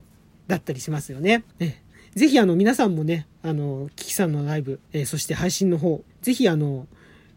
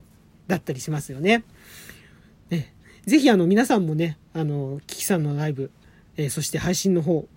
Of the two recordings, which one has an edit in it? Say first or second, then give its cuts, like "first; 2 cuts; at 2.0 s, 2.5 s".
first; 3 cuts; at 1.5 s, 4.8 s, 6.1 s